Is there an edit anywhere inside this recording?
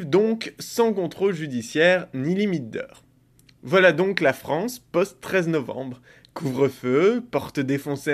no; 0 cuts

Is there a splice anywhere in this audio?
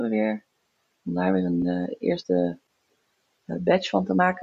no; 0 cuts

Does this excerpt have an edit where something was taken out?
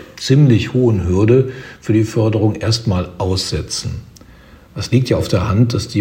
no; 0 cuts

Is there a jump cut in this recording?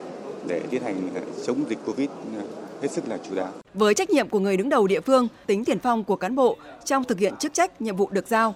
yes; 2 cuts; at 3.7 s, 5.4 s

